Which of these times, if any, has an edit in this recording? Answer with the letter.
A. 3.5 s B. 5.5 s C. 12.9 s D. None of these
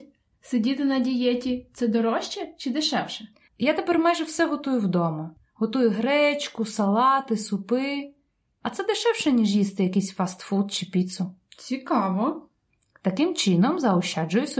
A